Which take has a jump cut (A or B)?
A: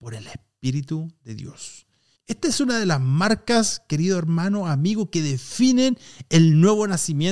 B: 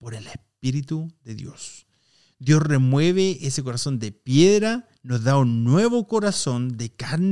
A